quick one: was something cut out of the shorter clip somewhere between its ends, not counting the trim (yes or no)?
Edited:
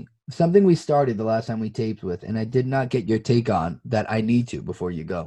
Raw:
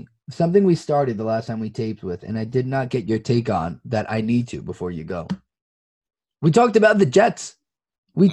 no